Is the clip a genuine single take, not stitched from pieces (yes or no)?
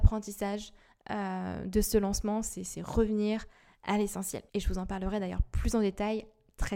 no